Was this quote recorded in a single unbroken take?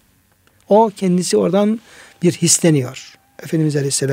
yes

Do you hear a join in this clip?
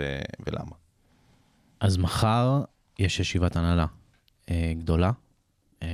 no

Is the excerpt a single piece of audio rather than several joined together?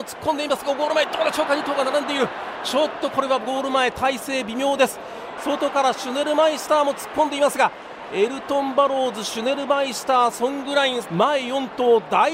no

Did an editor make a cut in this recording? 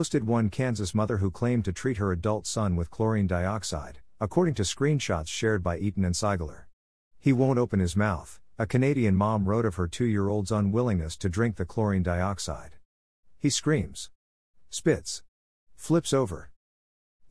no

